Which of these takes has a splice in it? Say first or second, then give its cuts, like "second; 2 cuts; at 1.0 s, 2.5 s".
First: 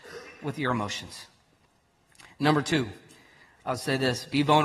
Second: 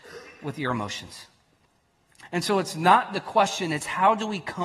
second; 1 cut; at 2.2 s